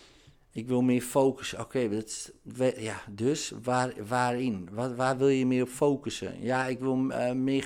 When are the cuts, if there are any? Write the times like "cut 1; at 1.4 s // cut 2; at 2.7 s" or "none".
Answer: none